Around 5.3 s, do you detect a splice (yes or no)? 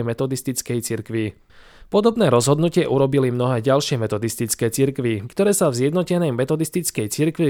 yes